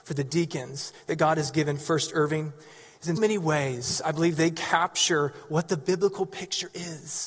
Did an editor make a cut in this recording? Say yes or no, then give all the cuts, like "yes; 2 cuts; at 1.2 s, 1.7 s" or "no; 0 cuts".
yes; 1 cut; at 3.2 s